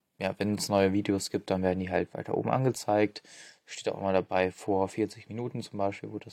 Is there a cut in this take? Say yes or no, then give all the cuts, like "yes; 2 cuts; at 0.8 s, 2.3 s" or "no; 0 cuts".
no; 0 cuts